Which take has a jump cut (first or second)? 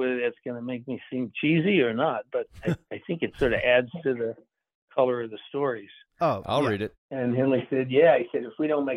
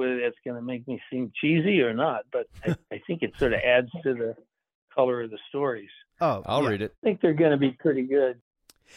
first